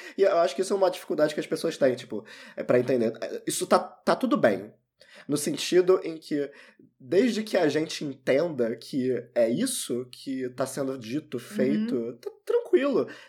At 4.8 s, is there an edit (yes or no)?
no